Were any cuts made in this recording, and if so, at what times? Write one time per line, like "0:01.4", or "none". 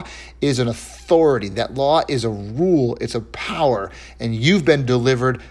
none